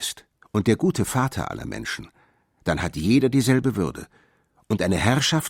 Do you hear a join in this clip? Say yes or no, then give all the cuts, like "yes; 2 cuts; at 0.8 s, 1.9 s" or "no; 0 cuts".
no; 0 cuts